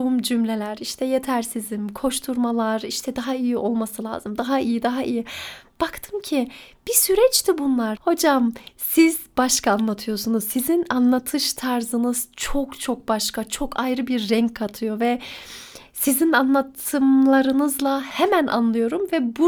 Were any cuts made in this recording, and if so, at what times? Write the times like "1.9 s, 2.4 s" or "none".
8.0 s